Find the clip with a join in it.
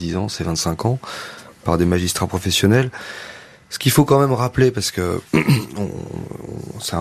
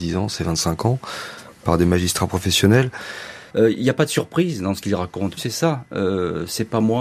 second; 2 cuts; at 3.5 s, 5.4 s

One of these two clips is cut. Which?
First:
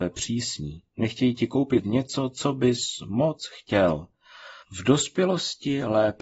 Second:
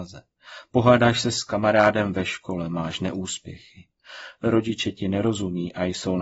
first; 1 cut; at 4.6 s

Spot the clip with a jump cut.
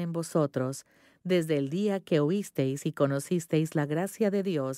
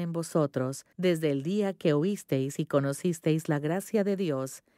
second; 1 cut; at 0.9 s

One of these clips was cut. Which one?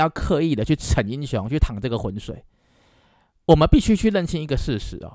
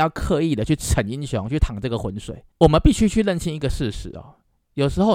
second; 1 cut; at 2.5 s

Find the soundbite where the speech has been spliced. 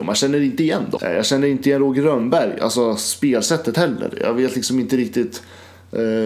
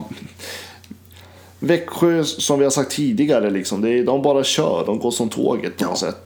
first; 1 cut; at 1.0 s

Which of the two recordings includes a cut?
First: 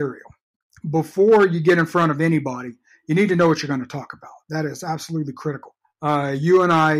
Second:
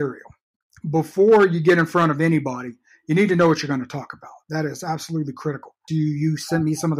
second; 1 cut; at 5.9 s

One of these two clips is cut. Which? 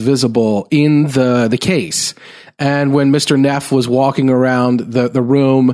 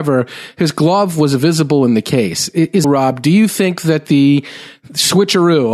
second; 1 cut; at 2.8 s

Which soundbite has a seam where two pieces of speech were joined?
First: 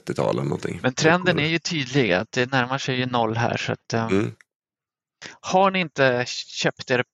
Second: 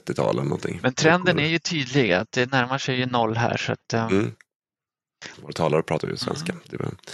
second; 1 cut; at 5.3 s

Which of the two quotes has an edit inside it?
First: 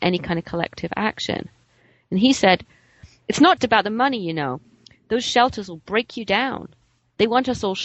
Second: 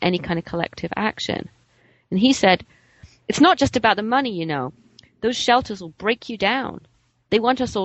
first; 1 cut; at 3.6 s

